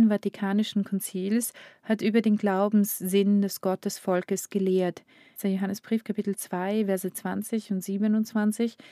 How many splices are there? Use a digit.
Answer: 1